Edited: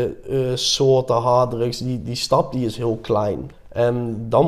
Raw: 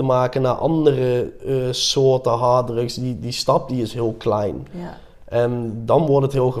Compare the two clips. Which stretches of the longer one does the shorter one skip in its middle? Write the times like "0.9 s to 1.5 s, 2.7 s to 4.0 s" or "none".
4.7 s to 5.1 s